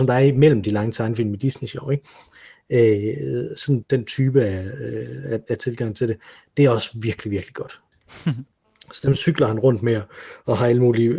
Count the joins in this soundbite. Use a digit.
2